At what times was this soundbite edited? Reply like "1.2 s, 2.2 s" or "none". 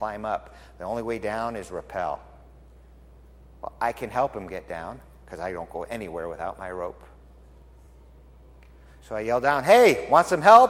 none